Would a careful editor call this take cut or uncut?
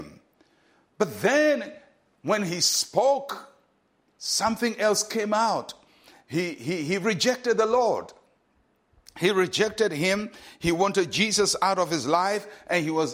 uncut